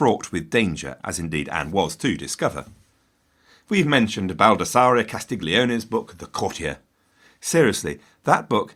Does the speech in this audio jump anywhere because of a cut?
no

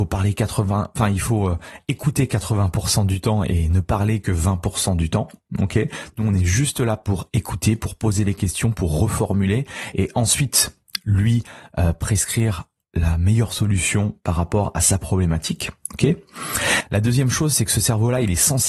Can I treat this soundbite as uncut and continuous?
yes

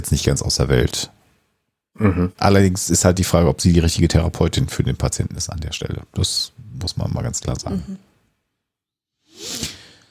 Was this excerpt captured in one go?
yes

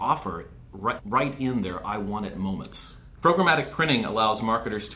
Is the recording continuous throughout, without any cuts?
no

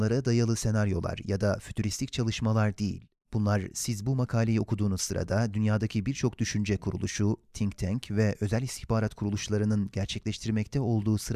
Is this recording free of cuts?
yes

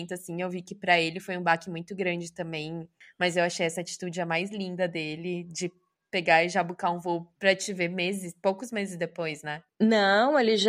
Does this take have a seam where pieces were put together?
no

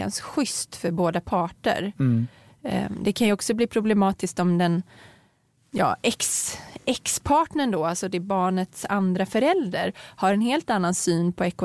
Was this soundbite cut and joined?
no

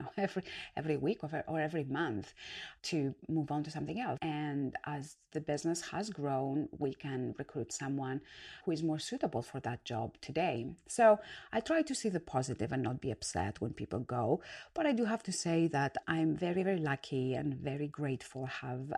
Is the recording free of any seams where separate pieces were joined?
no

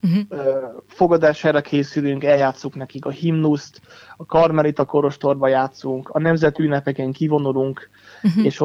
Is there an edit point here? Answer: no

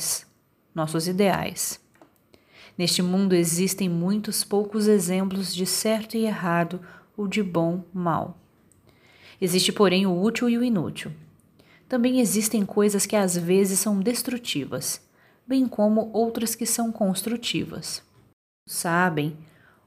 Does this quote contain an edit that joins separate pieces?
no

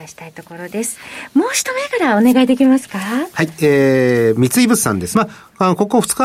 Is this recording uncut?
no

